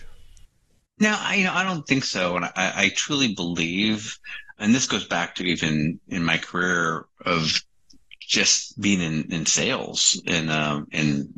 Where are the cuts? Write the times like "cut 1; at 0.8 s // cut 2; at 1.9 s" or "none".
cut 1; at 4.6 s